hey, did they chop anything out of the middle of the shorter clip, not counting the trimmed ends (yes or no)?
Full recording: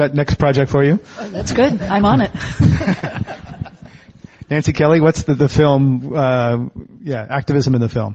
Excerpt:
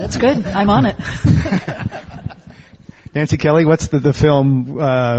no